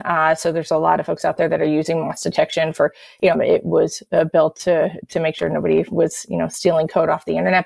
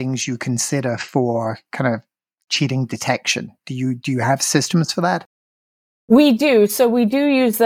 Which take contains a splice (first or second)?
first